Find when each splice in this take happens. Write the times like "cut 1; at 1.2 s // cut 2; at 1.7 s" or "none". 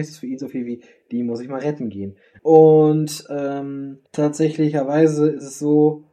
cut 1; at 2.4 s // cut 2; at 4.1 s